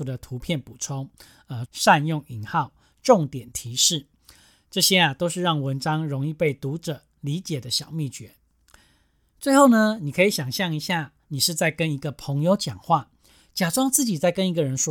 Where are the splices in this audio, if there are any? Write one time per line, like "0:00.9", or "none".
0:01.7